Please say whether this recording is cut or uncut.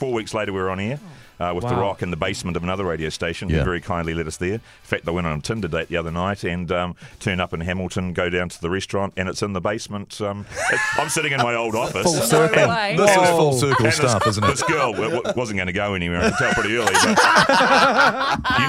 uncut